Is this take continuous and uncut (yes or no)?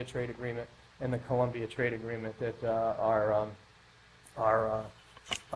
yes